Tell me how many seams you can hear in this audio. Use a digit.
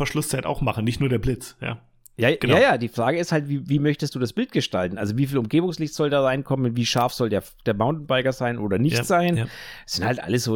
0